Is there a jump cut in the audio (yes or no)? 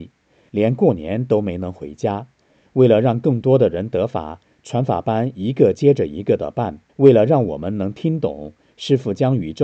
yes